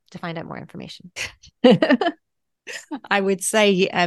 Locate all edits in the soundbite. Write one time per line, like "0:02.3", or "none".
0:01.2